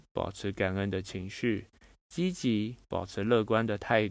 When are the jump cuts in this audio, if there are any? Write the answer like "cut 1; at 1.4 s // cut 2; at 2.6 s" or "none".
none